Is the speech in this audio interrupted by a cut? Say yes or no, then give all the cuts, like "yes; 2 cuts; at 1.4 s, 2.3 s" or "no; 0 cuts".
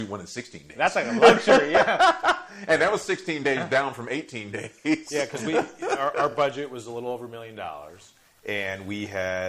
no; 0 cuts